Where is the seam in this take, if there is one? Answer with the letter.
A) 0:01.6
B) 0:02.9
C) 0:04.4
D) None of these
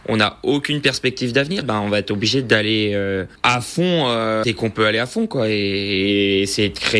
A